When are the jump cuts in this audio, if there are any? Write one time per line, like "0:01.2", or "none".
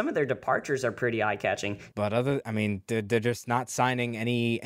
0:01.9